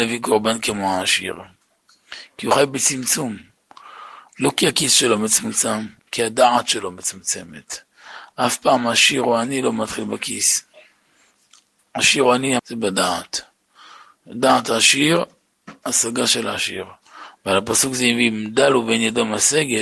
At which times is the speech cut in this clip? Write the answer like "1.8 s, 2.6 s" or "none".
6.0 s, 12.6 s, 17.4 s